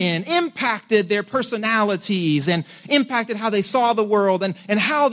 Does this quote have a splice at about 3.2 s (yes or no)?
no